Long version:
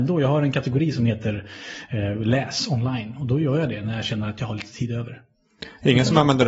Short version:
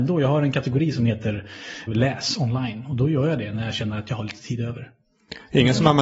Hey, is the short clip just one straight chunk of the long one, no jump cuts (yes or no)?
no